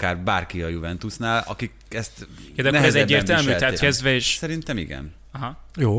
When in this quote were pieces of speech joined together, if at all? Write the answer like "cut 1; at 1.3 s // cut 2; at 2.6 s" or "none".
cut 1; at 3.8 s